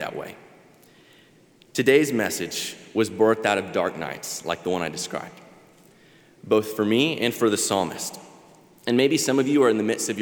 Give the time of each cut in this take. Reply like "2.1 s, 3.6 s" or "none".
none